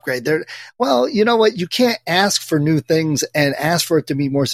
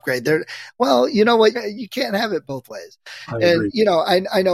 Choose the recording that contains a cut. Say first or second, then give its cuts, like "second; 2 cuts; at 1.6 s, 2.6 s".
second; 1 cut; at 1.5 s